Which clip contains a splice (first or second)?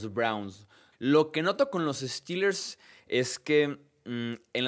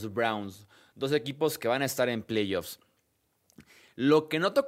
first